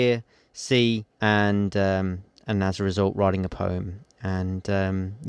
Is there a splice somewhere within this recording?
yes; 1 cut; at 1.1 s

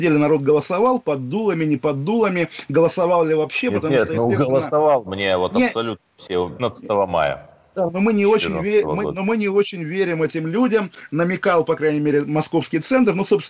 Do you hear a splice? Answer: yes; 1 cut; at 6.6 s

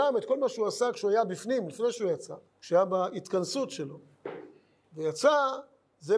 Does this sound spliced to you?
yes; 1 cut; at 2.5 s

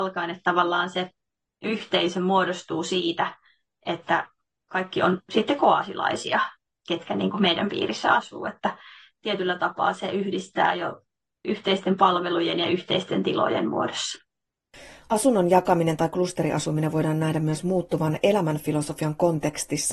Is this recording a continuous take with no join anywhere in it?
yes; 0 cuts

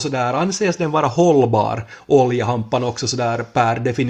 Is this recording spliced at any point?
no; 0 cuts

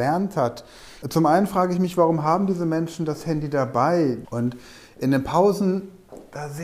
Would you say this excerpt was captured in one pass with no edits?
no; 2 cuts; at 1.0 s, 4.2 s

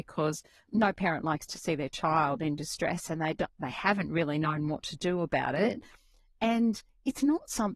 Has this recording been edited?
no; 0 cuts

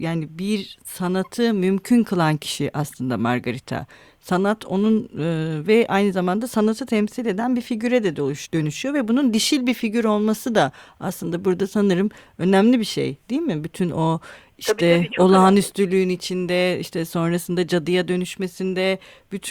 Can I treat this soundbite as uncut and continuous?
yes; 0 cuts

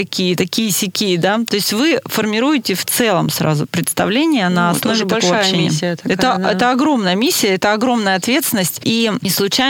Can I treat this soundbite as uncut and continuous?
yes; 0 cuts

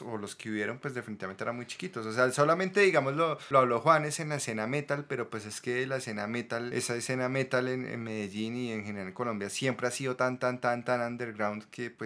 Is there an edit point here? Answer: no; 0 cuts

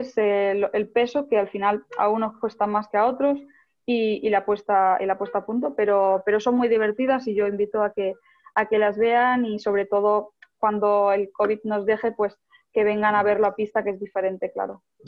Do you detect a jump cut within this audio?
no; 0 cuts

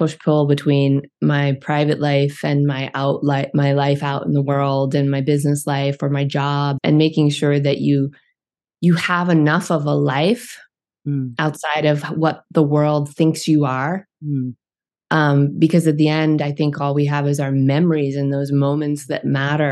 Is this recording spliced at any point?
yes; 1 cut; at 6.8 s

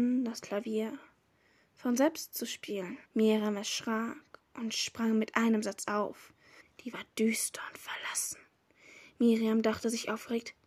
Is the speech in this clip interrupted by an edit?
yes; 2 cuts; at 3.0 s, 6.6 s

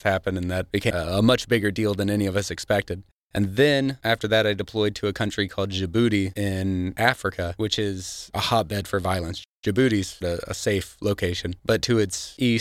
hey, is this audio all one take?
no; 1 cut; at 10.2 s

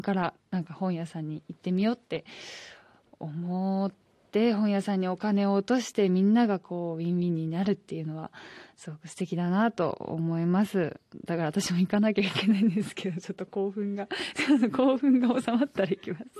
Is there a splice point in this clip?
no; 0 cuts

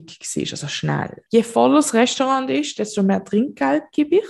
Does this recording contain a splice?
yes; 1 cut; at 1.3 s

